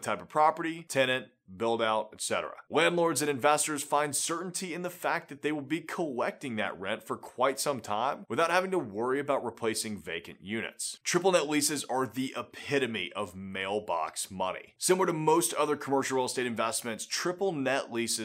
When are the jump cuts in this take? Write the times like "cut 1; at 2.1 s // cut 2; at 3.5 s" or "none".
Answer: cut 1; at 11.0 s // cut 2; at 14.8 s